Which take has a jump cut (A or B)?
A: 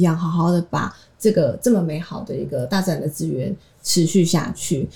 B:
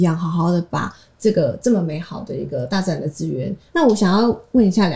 B